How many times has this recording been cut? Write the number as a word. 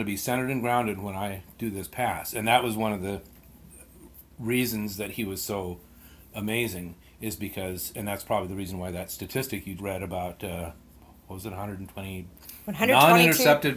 one